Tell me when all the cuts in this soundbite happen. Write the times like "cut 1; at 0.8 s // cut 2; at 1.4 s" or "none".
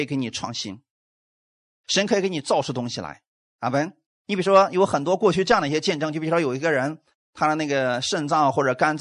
none